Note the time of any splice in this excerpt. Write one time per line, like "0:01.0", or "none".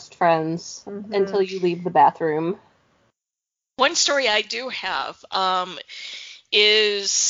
none